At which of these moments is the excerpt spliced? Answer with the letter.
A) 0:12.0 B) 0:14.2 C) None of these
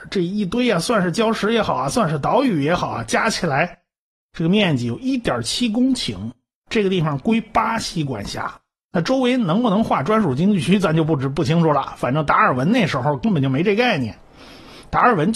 C